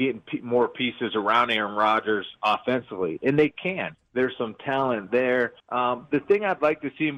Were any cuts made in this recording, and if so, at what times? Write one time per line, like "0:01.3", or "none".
0:03.9
0:05.6